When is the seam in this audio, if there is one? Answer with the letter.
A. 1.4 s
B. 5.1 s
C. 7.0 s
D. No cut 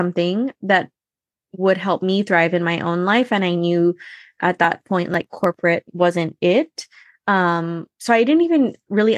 D